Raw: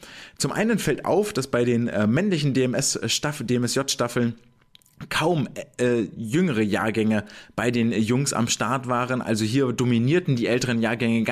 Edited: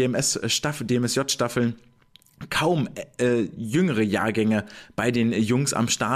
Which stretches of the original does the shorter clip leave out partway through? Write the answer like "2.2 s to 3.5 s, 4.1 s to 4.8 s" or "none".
none